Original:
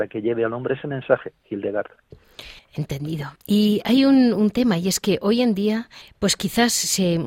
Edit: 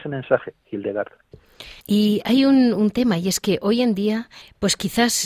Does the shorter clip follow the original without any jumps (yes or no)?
no